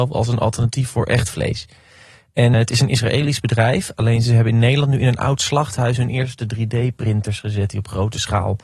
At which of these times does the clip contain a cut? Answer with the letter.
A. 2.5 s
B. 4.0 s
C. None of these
A